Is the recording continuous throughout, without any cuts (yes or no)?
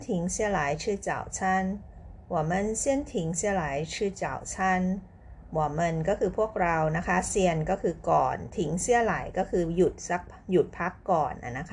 yes